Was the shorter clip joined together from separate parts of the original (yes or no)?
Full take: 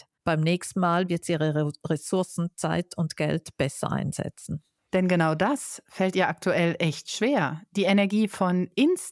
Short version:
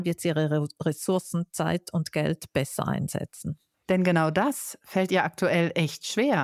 no